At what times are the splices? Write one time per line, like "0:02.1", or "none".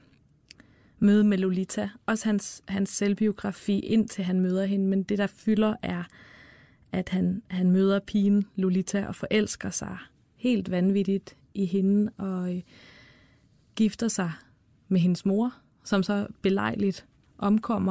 none